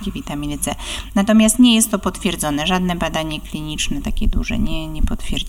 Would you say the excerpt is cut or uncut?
uncut